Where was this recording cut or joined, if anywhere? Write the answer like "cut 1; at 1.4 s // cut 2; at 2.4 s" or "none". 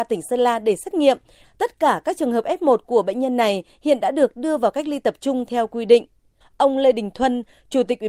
cut 1; at 1.4 s // cut 2; at 6.4 s